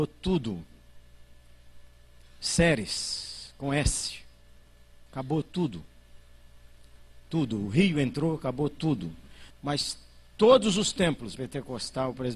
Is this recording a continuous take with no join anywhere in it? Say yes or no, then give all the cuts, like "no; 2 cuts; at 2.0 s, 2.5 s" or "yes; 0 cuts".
no; 2 cuts; at 9.5 s, 11.4 s